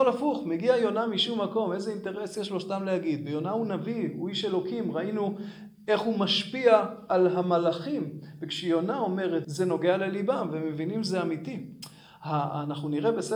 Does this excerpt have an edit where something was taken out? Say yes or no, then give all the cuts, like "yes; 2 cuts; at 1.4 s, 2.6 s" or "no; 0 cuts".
yes; 1 cut; at 9.4 s